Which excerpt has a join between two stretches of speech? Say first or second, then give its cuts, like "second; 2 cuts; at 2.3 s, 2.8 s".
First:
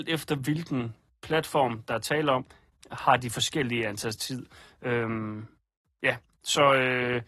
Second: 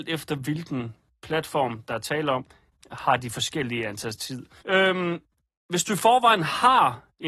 second; 1 cut; at 4.6 s